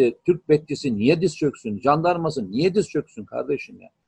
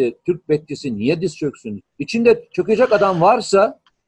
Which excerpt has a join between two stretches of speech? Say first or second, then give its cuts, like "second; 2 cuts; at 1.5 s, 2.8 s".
second; 1 cut; at 1.8 s